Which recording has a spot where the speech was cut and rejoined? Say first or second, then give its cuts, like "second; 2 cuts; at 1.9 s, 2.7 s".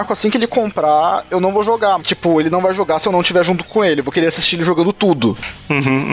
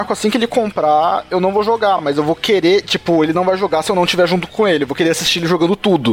first; 1 cut; at 2.0 s